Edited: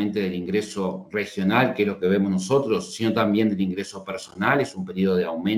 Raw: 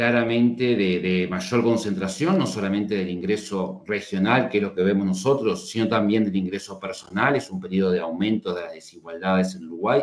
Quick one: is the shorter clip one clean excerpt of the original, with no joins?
yes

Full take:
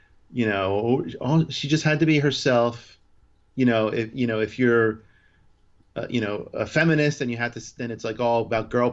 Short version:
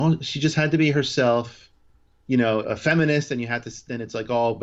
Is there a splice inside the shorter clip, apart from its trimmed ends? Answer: yes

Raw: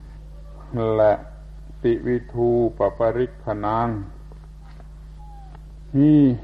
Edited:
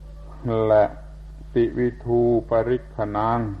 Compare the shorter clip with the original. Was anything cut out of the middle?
yes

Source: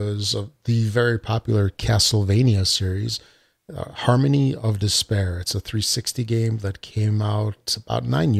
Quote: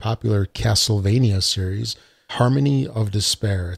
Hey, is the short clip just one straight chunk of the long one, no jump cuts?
no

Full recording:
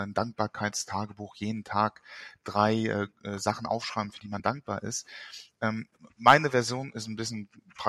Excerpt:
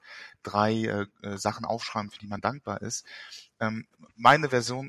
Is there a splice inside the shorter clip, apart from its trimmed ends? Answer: no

